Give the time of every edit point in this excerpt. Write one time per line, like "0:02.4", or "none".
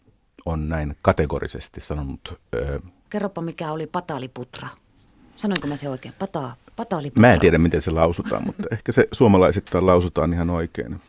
0:03.1